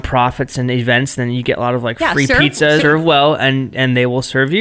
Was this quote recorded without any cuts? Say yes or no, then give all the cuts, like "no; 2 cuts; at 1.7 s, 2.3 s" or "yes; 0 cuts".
no; 1 cut; at 2.8 s